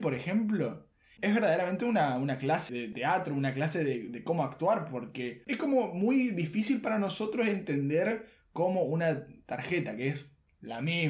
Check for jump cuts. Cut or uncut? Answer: cut